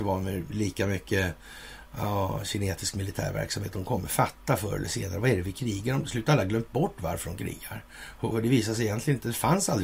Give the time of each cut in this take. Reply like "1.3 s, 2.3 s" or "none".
8.3 s